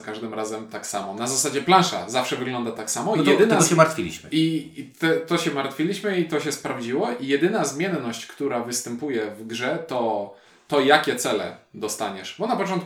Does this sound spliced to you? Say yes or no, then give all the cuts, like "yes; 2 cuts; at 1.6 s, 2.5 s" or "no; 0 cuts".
no; 0 cuts